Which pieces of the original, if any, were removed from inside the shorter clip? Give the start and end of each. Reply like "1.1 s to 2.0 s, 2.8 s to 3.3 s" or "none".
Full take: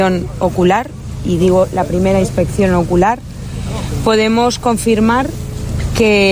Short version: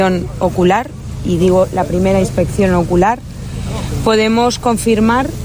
none